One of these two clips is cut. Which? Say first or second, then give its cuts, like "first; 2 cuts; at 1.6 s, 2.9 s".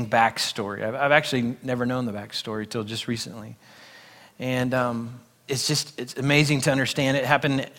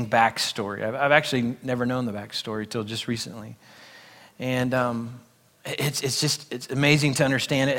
first; 1 cut; at 5.5 s